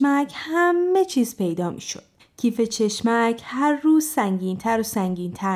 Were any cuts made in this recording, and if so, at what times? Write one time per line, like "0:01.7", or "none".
0:02.2